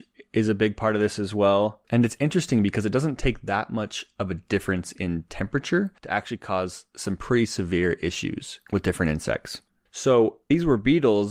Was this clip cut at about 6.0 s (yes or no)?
no